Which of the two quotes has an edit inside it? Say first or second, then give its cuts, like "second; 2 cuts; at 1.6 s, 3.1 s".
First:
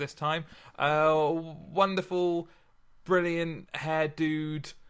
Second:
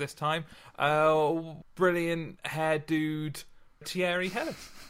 second; 2 cuts; at 1.6 s, 3.8 s